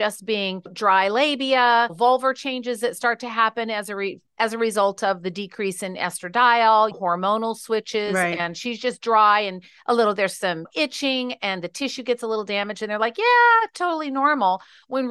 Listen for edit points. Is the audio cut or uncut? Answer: uncut